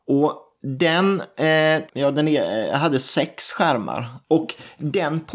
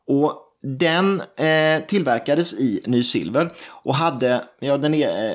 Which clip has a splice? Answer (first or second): first